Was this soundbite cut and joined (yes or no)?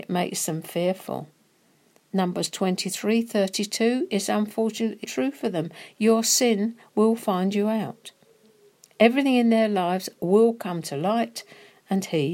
yes